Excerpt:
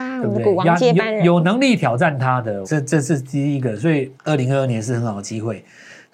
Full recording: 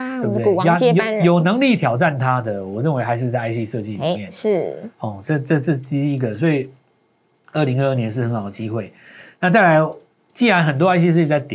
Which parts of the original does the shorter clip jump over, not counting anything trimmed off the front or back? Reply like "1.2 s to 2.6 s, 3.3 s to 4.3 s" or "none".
2.6 s to 5.2 s, 6.7 s to 7.4 s